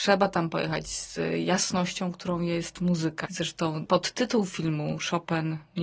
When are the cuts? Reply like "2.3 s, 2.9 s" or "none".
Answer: 3.2 s